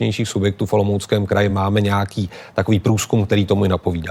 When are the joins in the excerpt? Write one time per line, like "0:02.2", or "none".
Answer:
none